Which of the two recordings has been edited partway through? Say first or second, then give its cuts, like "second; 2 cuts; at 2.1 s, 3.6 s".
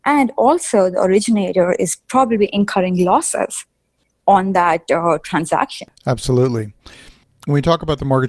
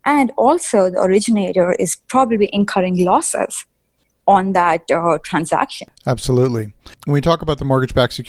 second; 1 cut; at 6.9 s